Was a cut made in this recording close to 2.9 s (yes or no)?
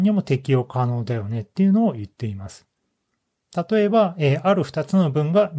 no